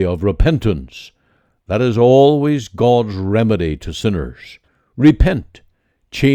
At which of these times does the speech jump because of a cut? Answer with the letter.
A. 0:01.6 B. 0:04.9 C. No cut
A